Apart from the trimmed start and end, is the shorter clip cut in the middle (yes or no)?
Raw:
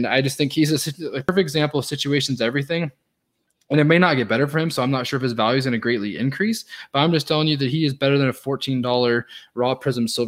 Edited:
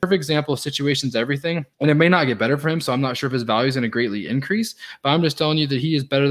yes